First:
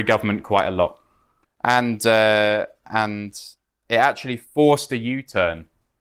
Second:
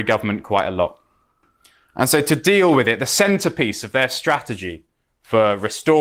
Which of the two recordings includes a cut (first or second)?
first